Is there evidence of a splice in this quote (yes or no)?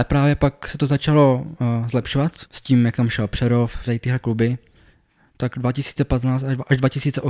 yes